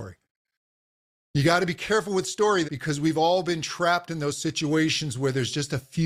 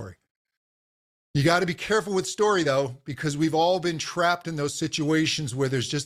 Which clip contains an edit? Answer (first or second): first